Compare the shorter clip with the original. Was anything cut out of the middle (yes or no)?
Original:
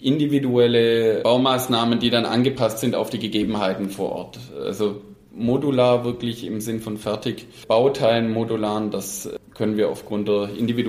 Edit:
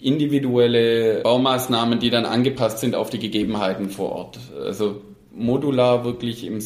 no